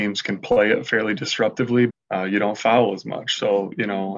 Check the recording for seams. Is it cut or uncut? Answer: cut